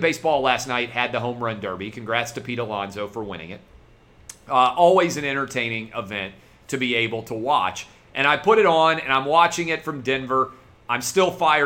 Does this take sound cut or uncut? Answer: uncut